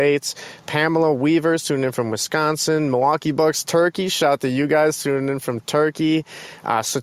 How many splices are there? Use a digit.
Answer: 0